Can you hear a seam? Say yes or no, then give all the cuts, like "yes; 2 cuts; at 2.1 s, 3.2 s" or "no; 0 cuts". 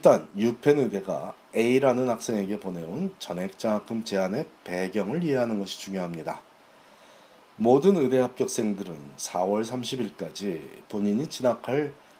no; 0 cuts